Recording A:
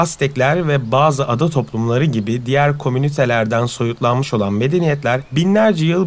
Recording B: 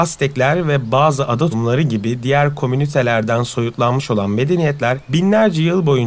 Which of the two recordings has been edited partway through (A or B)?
B